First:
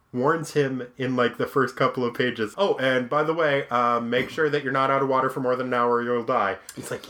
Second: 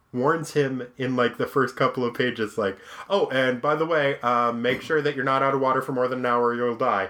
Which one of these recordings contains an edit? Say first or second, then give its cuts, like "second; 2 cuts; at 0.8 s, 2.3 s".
first; 1 cut; at 2.5 s